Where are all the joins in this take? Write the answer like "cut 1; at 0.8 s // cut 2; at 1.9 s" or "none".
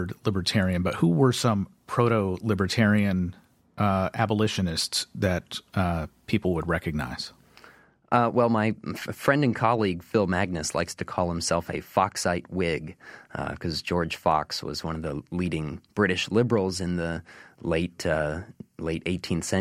none